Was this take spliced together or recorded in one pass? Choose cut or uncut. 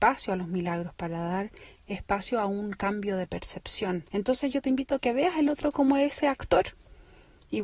cut